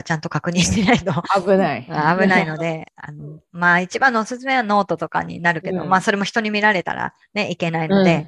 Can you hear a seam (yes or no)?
no